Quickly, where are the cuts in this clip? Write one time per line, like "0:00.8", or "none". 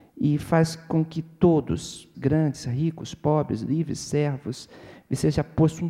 0:02.1